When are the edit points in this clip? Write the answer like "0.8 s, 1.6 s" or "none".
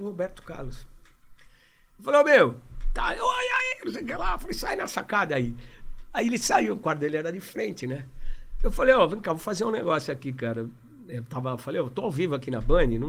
none